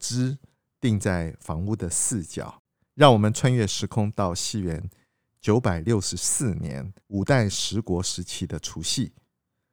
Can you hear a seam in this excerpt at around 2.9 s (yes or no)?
yes